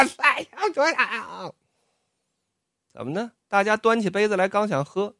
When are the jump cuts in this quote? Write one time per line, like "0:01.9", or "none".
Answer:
none